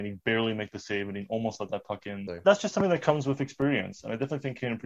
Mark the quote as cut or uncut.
cut